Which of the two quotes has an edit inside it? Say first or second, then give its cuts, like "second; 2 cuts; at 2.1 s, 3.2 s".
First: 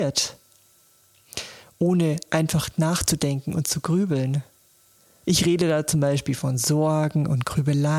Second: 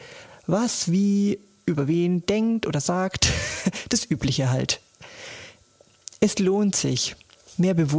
first; 1 cut; at 5.2 s